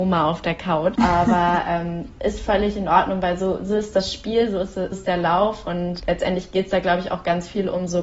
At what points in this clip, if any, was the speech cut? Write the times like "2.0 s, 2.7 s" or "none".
0.9 s, 4.9 s, 6.0 s